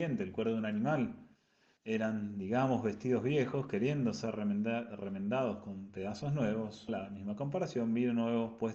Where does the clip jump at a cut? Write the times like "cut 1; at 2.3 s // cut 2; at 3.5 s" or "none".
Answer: cut 1; at 1.8 s // cut 2; at 6.9 s